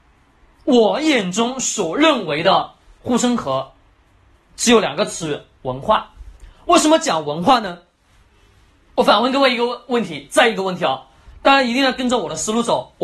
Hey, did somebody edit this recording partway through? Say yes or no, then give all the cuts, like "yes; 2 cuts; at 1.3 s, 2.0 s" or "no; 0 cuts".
no; 0 cuts